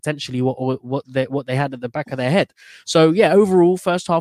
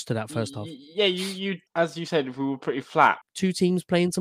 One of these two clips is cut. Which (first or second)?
second